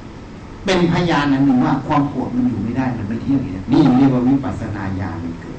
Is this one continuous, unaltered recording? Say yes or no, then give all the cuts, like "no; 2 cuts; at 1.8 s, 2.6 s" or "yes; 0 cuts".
no; 1 cut; at 3.6 s